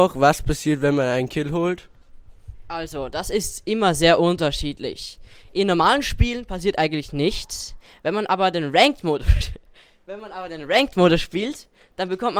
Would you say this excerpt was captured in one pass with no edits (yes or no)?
yes